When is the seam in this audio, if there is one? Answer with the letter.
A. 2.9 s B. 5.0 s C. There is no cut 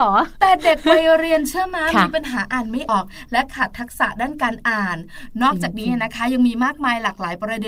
A